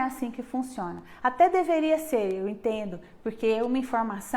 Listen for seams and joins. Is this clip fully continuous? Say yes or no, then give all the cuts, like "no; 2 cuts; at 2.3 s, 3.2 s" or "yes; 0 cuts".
yes; 0 cuts